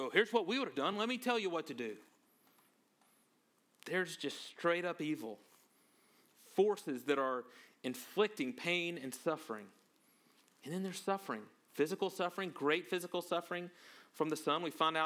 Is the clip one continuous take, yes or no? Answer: yes